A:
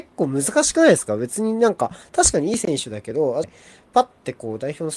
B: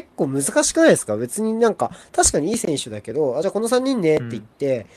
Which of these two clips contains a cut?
A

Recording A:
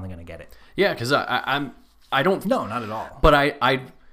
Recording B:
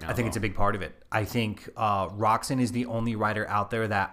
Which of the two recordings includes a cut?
A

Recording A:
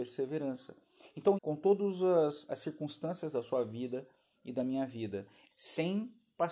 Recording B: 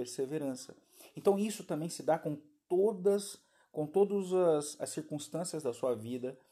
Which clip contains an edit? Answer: A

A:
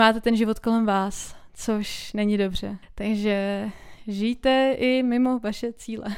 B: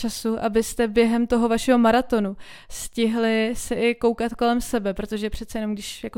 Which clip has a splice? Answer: A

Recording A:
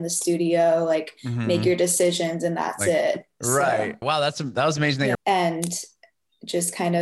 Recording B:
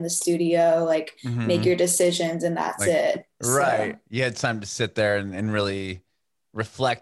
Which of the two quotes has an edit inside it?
A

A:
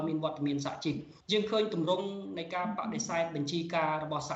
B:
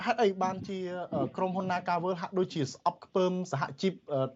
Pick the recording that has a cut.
A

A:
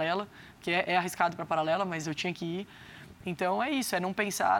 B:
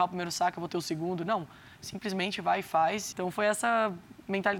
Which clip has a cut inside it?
B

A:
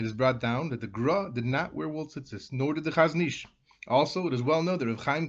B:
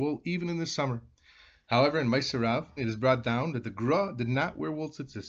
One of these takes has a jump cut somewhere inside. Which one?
B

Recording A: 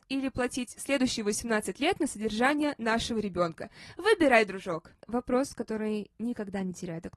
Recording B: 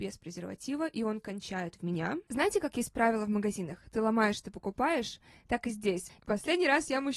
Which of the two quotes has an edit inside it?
B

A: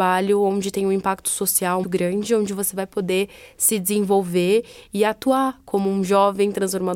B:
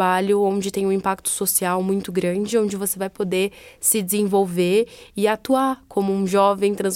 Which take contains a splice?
A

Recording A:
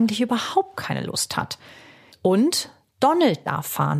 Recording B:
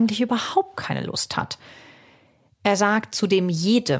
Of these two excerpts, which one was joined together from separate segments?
A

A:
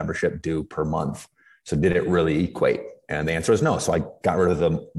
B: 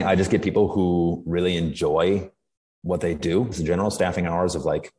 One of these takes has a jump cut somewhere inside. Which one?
B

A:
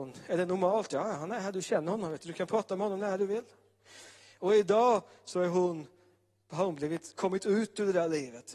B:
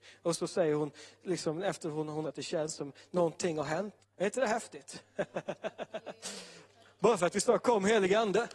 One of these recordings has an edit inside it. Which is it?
B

